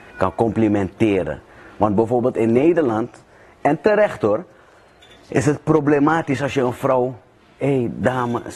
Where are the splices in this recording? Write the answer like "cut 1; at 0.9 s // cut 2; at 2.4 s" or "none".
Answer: none